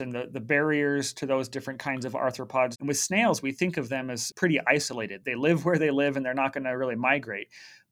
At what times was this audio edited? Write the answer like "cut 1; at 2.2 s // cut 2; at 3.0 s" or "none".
cut 1; at 2.7 s

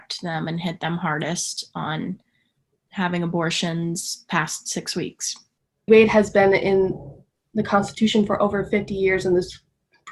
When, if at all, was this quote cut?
cut 1; at 5.9 s

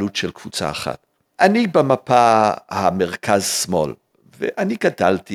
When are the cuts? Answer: none

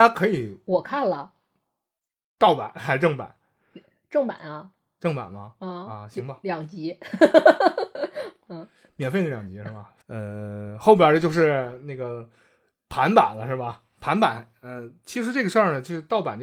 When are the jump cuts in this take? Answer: cut 1; at 10.0 s

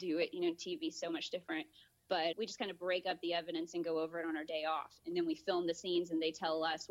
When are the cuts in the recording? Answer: cut 1; at 2.3 s

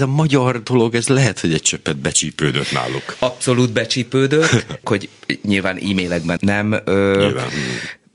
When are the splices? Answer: cut 1; at 4.8 s // cut 2; at 6.4 s

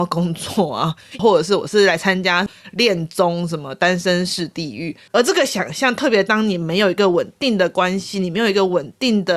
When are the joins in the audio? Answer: cut 1; at 1.2 s // cut 2; at 5.1 s

